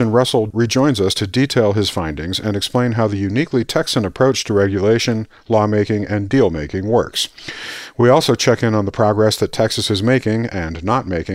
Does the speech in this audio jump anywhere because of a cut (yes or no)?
no